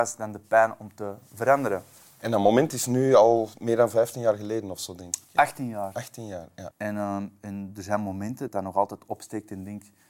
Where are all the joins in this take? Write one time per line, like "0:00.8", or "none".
0:06.7
0:08.5